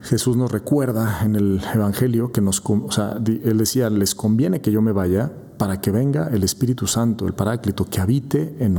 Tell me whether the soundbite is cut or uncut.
uncut